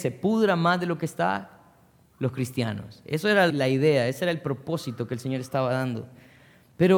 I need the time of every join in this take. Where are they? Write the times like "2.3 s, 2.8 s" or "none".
3.5 s